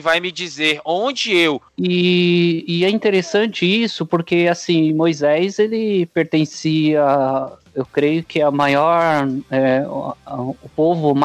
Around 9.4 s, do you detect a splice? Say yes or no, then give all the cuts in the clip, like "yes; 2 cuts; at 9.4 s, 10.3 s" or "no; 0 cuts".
no; 1 cut; at 1.7 s